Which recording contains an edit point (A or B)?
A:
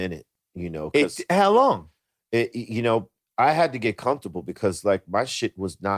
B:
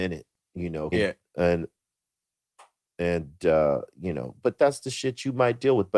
B